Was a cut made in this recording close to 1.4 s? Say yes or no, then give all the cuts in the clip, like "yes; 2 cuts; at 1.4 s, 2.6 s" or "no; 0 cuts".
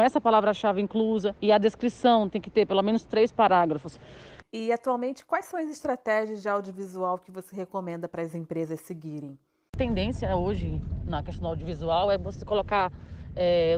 yes; 2 cuts; at 1.4 s, 4.4 s